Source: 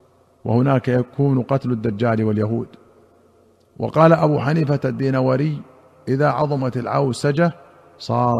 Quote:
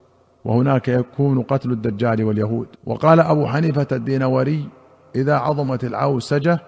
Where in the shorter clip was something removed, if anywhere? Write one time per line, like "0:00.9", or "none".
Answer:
0:02.7

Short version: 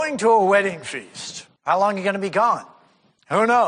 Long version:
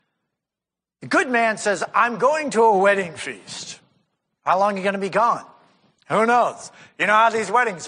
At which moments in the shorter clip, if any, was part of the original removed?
0:01.6

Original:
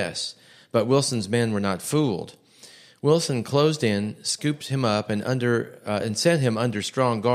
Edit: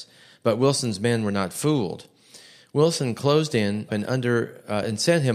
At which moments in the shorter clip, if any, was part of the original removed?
0:03.9

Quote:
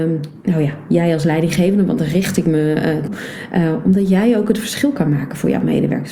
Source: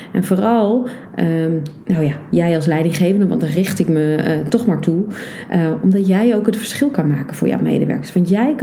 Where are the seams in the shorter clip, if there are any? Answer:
0:03.1

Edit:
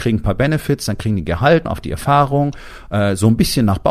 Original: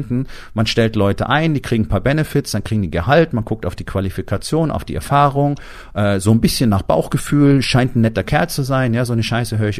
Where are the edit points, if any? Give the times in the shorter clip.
0:01.7

